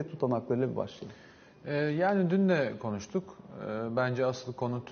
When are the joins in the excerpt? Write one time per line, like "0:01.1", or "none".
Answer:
none